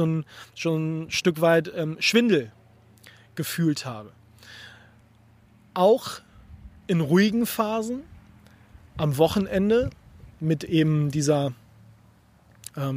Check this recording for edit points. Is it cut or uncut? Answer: uncut